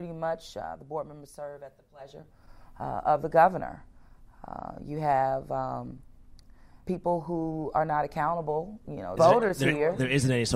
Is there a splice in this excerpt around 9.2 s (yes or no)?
yes